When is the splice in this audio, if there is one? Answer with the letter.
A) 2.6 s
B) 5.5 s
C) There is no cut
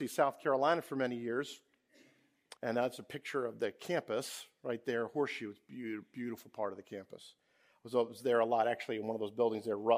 A